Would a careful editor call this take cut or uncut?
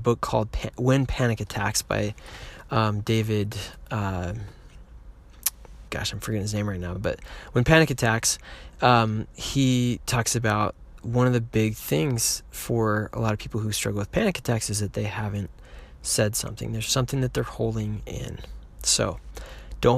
uncut